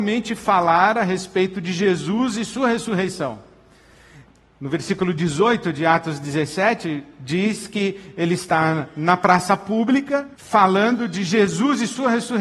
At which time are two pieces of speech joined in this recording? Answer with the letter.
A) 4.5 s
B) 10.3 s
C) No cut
B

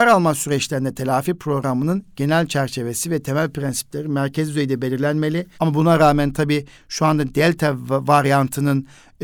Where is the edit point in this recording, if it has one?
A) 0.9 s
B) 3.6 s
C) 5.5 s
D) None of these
C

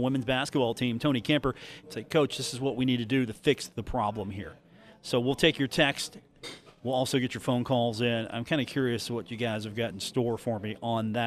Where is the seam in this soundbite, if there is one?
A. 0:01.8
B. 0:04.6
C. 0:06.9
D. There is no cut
A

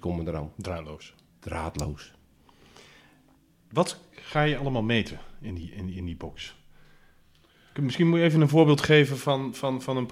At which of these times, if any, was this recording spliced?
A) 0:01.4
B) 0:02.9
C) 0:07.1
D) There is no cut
D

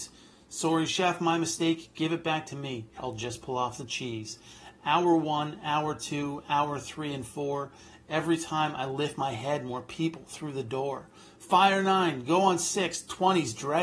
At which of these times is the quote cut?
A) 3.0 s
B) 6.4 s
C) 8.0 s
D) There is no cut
A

